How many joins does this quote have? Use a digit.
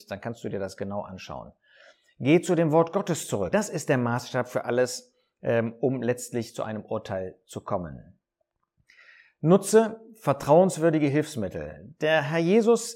1